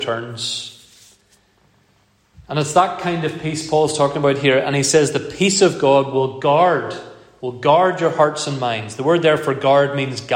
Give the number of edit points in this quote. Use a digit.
0